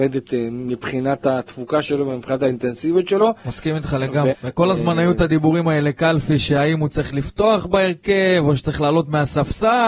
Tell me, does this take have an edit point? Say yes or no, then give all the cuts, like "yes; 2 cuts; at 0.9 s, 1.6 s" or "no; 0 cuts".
yes; 1 cut; at 4.3 s